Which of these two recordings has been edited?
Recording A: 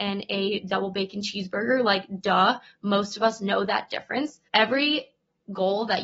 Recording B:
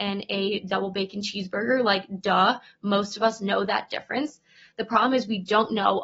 A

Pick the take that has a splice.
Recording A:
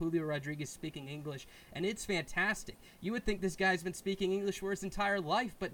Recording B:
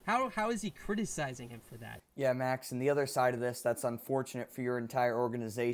B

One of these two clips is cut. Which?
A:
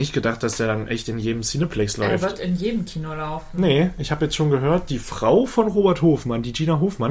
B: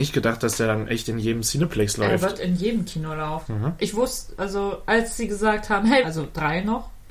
B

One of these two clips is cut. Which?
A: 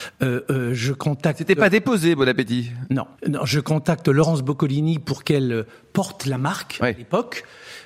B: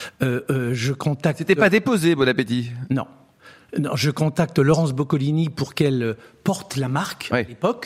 A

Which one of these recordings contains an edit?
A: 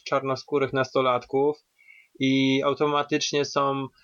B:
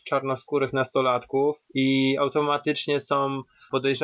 B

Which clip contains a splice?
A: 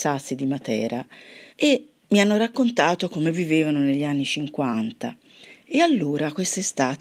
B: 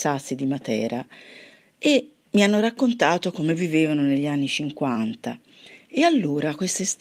A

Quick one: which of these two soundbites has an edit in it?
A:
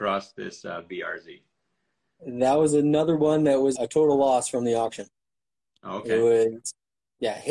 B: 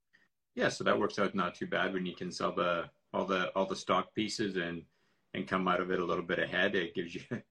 A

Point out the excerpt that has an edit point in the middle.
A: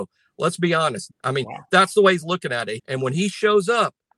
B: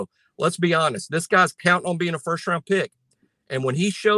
A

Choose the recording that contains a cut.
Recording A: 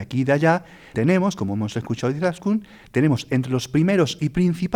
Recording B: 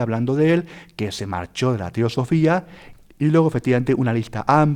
A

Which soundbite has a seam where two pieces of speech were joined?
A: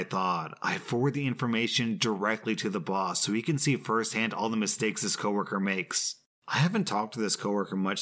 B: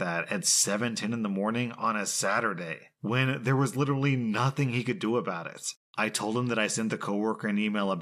B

